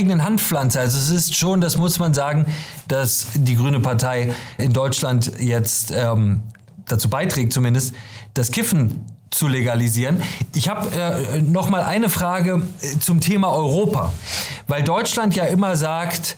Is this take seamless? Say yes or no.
no